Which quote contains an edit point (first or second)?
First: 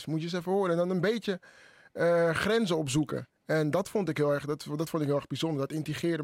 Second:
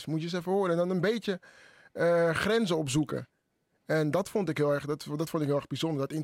first